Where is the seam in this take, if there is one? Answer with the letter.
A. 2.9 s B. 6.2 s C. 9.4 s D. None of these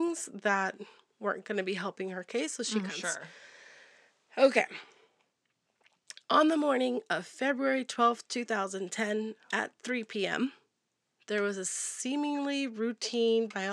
A